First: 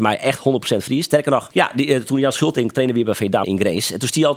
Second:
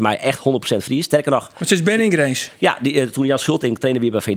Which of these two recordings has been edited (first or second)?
first